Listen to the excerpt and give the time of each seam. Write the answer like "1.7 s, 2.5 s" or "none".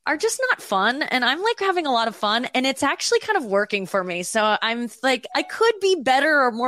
5.3 s